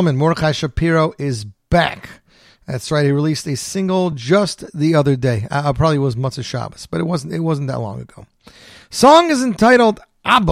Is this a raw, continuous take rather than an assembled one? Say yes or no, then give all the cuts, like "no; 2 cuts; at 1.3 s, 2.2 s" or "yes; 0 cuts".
yes; 0 cuts